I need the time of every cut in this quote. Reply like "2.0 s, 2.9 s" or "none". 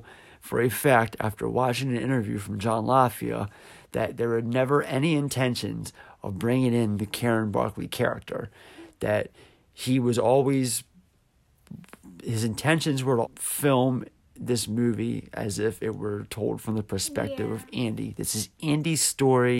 13.2 s

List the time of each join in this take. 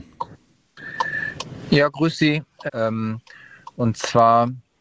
2.7 s

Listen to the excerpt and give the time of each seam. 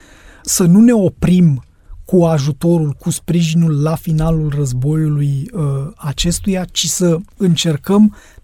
none

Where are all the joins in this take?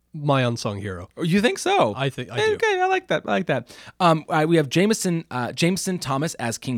none

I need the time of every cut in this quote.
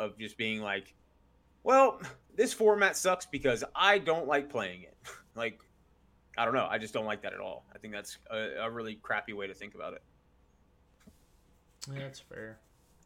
5.3 s

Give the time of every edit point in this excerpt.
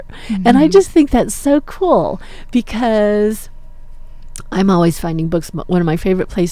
none

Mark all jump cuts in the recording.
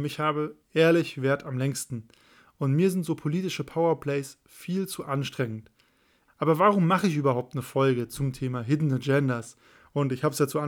6.3 s

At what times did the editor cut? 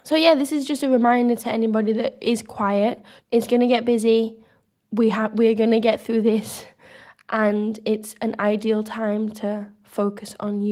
3.2 s

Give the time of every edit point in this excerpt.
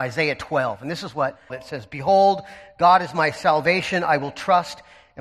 1.5 s

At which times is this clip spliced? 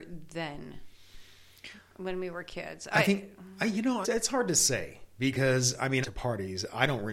4.0 s, 6.0 s

